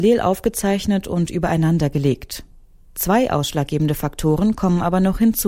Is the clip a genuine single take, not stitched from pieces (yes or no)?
yes